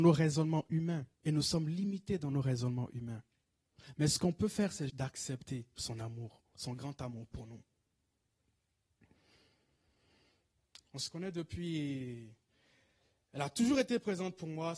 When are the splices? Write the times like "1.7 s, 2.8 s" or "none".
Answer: 1.1 s, 4.9 s, 10.9 s

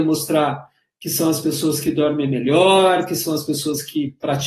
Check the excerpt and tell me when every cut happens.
none

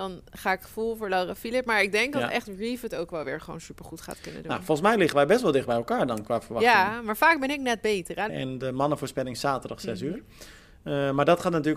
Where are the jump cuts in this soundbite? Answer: 8.3 s

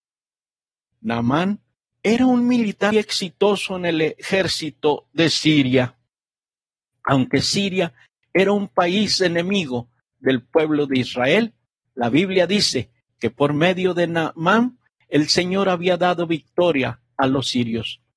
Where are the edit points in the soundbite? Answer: 2.9 s

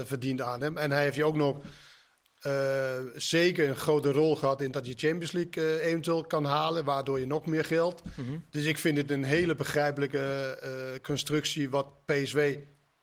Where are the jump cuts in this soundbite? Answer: none

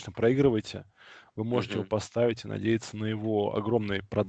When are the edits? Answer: none

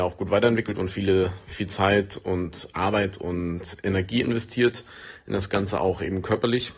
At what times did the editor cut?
none

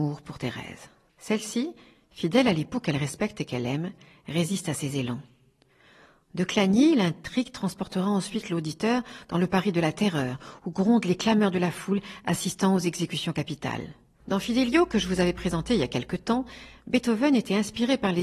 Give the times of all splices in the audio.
14.2 s

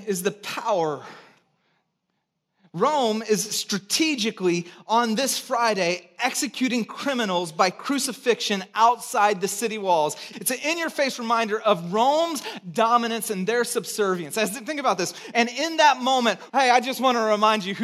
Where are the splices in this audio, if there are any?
10.3 s, 15.3 s, 16.5 s

